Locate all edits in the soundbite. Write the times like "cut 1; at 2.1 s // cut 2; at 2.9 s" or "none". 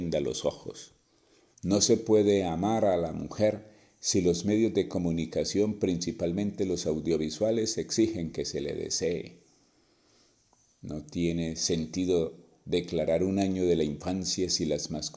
cut 1; at 1.5 s